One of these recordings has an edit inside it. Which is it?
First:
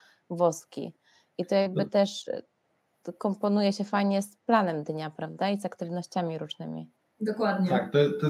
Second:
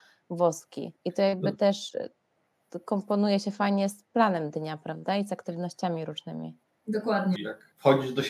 second; 2 cuts; at 1.0 s, 7.4 s

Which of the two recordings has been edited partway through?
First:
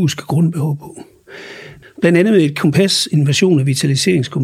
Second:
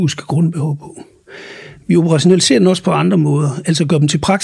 first; 1 cut; at 1.8 s

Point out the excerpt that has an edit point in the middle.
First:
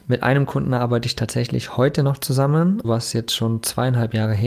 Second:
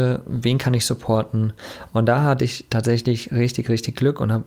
first; 1 cut; at 2.8 s

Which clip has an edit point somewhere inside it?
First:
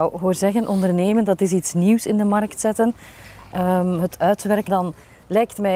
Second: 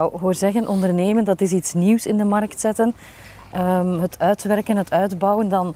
first; 1 cut; at 4.7 s

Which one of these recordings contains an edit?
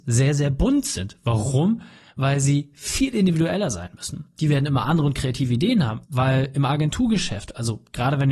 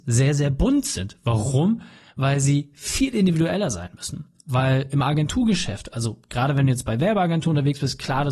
first; 2 cuts; at 4.4 s, 6.0 s

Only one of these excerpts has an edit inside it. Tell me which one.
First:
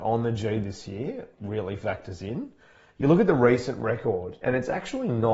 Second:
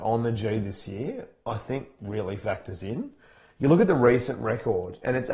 first; 1 cut; at 1.3 s

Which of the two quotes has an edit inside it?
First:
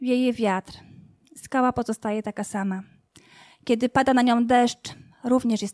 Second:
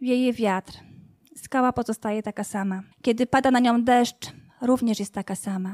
second; 1 cut; at 2.9 s

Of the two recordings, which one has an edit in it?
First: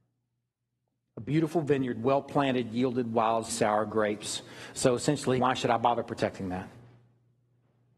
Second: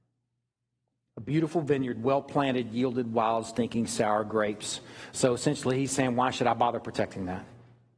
first; 2 cuts; at 3.5 s, 5.4 s

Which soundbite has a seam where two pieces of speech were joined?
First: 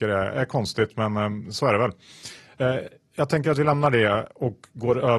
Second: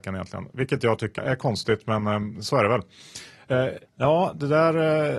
second; 2 cuts; at 1.2 s, 3.9 s

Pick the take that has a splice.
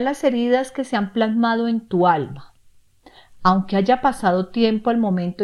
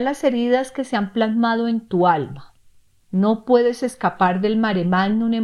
second; 1 cut; at 3.0 s

